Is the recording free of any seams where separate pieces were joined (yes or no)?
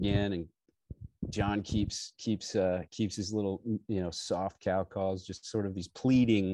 yes